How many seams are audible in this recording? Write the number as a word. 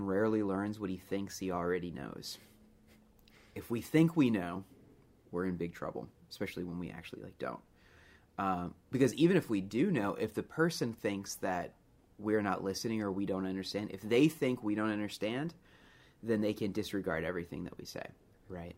zero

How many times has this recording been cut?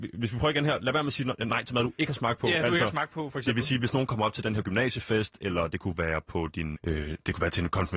one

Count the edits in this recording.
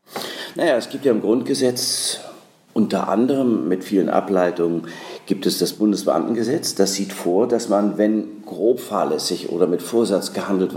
zero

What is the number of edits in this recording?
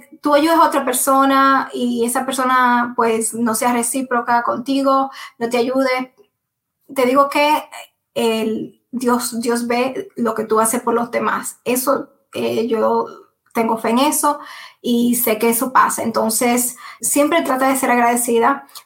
one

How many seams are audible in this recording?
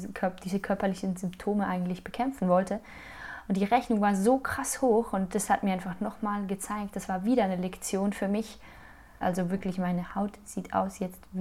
one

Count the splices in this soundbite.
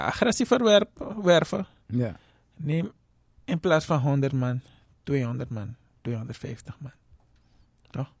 zero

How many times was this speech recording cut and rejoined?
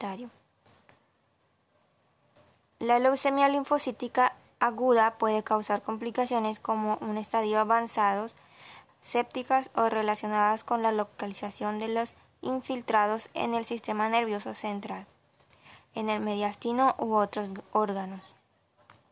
one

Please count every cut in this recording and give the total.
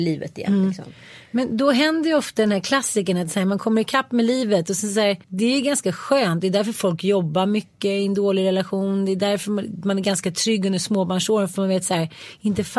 one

